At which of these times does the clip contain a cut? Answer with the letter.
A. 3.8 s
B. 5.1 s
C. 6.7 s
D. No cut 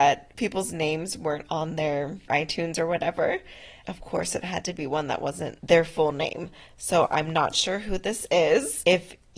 A